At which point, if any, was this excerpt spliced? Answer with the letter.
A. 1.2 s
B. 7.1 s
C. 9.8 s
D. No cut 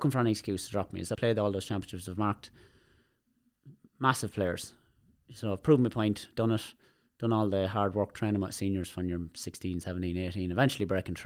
A